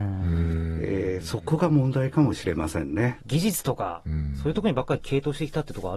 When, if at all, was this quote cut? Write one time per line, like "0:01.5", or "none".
0:03.2